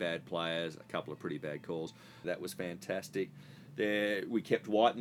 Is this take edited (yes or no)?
yes